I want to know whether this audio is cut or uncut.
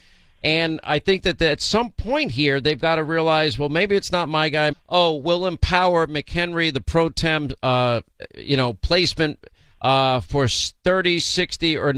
cut